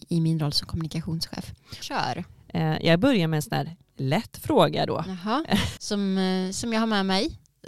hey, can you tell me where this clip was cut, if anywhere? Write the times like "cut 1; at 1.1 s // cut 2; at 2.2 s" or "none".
cut 1; at 1.8 s // cut 2; at 5.8 s